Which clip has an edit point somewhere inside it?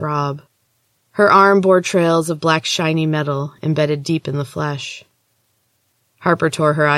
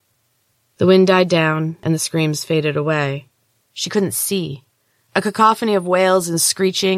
second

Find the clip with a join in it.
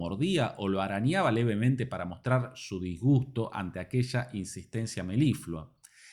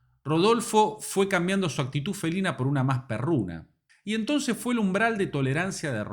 second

